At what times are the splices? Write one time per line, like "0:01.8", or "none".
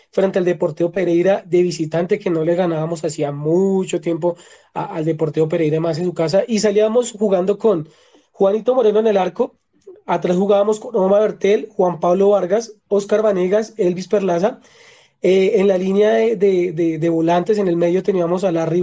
none

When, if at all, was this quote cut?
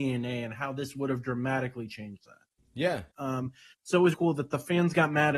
0:03.1
0:04.1

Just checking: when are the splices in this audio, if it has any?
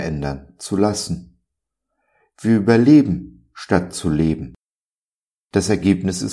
none

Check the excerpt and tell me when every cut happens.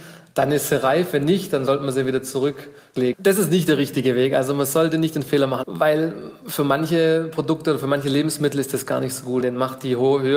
0:03.1
0:05.6
0:09.4

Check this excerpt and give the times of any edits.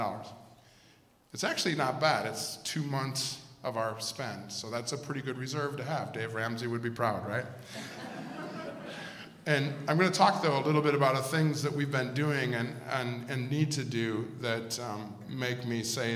none

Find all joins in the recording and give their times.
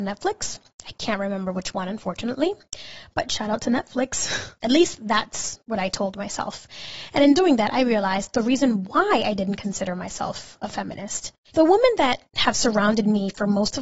0:04.6
0:11.5

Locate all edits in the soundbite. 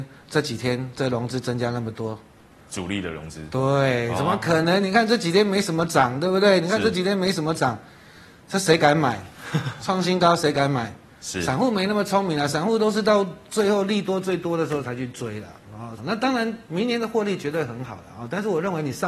0:16.0

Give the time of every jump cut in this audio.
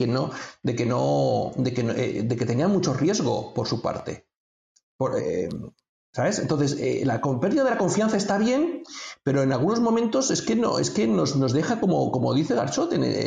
none

